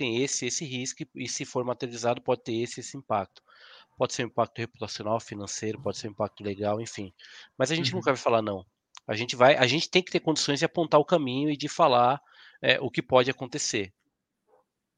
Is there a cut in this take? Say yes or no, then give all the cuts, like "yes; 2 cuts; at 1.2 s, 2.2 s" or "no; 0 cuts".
no; 0 cuts